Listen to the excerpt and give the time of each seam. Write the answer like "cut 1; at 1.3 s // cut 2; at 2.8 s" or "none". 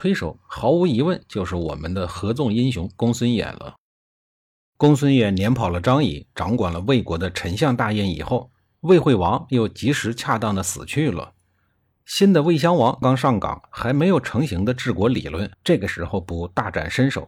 cut 1; at 13.0 s // cut 2; at 15.5 s